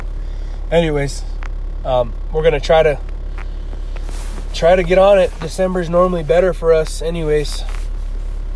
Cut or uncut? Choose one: uncut